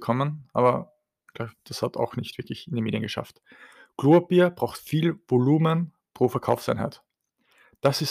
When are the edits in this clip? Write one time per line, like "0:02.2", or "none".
none